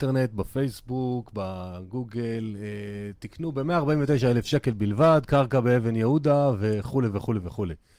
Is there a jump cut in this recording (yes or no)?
no